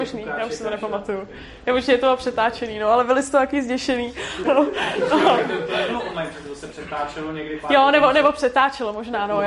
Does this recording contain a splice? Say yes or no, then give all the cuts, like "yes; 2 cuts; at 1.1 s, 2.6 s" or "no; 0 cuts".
yes; 1 cut; at 4.4 s